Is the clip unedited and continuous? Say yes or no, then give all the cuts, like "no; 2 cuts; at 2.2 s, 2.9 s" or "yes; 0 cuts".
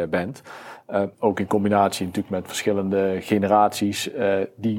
no; 1 cut; at 1.1 s